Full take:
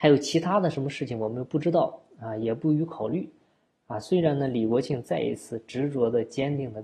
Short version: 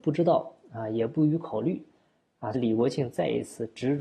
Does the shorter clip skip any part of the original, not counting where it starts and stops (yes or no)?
yes